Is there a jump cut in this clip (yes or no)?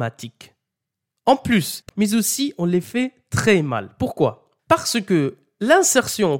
yes